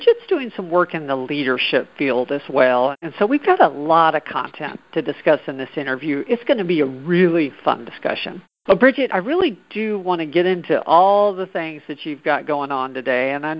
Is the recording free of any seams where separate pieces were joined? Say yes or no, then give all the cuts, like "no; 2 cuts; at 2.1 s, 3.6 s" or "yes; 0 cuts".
yes; 0 cuts